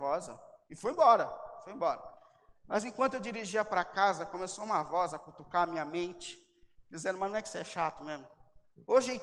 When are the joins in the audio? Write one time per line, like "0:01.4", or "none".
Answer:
none